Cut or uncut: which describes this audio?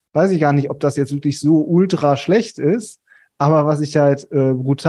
uncut